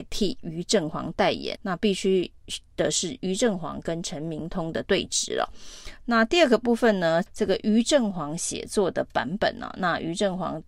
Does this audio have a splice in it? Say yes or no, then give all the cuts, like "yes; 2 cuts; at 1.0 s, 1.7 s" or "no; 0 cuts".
yes; 3 cuts; at 1.6 s, 6.0 s, 7.3 s